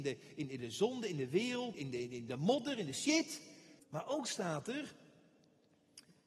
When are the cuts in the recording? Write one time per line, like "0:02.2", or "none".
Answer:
0:01.7
0:03.8